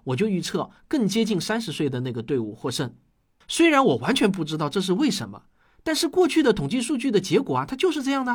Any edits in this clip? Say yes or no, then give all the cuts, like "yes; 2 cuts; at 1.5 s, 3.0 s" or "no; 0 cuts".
no; 0 cuts